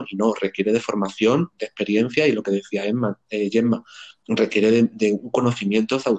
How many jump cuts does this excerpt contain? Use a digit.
1